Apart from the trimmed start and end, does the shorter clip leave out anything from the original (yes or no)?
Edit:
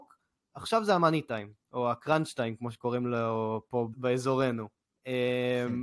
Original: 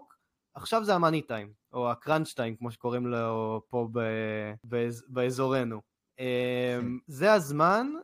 yes